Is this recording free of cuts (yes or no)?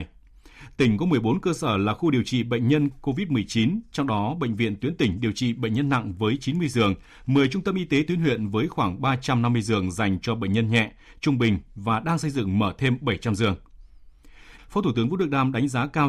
no